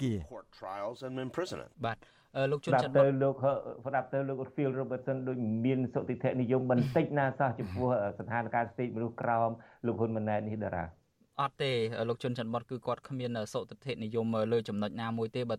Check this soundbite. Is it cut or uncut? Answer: cut